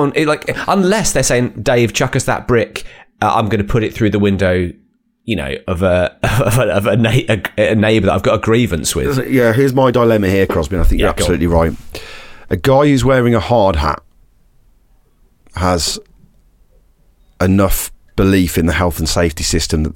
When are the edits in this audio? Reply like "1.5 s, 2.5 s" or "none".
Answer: none